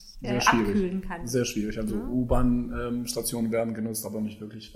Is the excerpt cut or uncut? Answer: uncut